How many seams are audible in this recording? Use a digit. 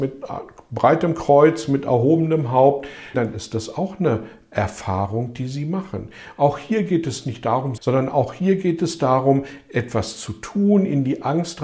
3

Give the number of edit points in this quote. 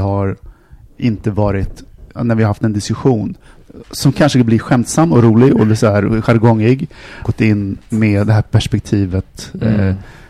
2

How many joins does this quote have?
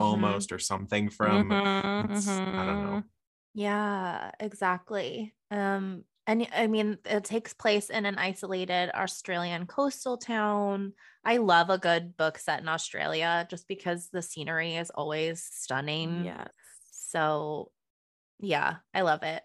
1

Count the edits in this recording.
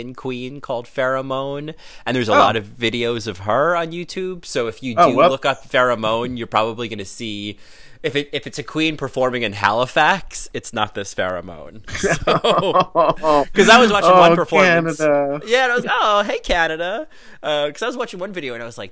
1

